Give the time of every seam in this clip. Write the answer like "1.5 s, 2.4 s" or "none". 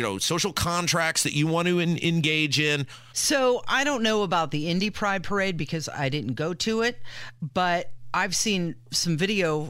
3.1 s